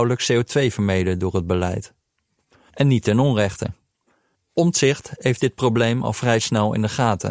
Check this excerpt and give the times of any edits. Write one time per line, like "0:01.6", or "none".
0:02.7
0:04.3